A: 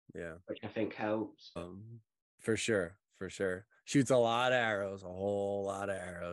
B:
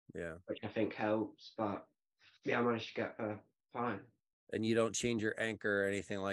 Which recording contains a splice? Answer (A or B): A